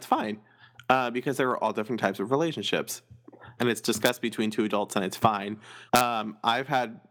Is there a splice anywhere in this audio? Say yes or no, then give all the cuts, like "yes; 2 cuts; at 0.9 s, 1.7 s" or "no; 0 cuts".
yes; 2 cuts; at 3.6 s, 5.9 s